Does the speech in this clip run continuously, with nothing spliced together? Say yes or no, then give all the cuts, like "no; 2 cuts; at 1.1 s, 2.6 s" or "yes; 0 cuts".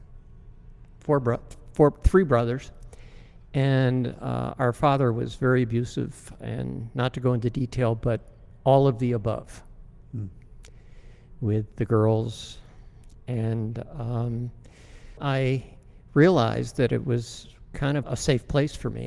no; 2 cuts; at 15.2 s, 18.0 s